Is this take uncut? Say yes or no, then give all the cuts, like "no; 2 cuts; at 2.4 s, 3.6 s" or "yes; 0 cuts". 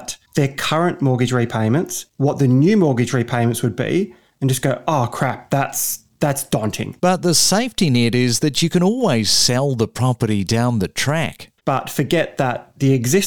no; 2 cuts; at 7.0 s, 11.6 s